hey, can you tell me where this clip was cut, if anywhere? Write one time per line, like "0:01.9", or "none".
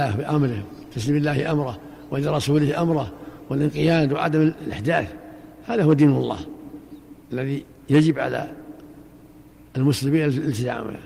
0:07.2